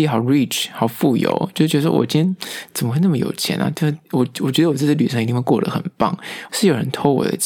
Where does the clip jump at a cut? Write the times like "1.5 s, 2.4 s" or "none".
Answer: 6.5 s